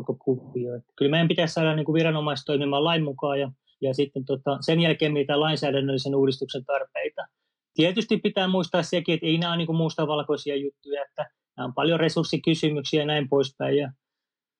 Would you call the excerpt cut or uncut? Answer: uncut